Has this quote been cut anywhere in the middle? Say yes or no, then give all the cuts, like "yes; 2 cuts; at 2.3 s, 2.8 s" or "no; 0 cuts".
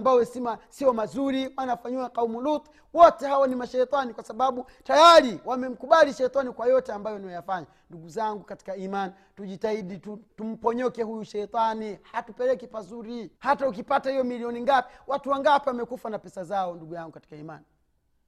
yes; 2 cuts; at 10.3 s, 13.4 s